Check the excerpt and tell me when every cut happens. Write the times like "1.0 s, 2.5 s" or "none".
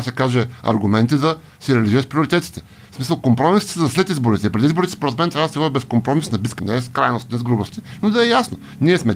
6.6 s